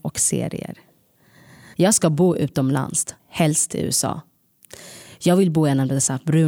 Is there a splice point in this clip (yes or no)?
yes